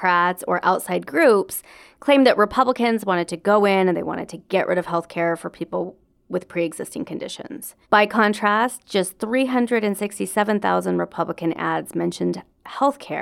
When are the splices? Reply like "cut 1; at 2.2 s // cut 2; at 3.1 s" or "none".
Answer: cut 1; at 7.8 s